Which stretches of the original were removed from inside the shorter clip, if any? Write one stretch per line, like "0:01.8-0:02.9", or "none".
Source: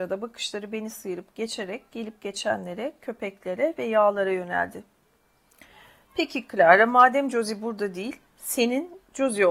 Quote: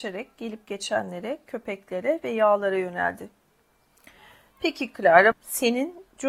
0:06.9-0:08.3